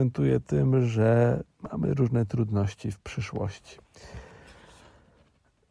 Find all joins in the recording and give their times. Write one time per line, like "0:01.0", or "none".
none